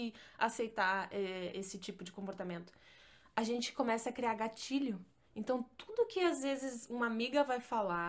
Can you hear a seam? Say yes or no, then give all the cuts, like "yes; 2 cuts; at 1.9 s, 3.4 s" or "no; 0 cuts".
no; 0 cuts